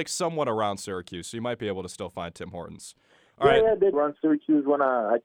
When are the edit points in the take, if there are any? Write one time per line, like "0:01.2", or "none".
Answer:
0:03.9